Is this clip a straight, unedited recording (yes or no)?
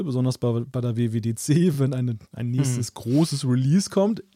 yes